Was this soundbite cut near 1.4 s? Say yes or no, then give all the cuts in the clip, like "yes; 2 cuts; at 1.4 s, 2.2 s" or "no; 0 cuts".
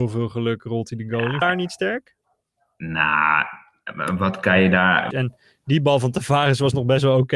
yes; 2 cuts; at 1.4 s, 5.1 s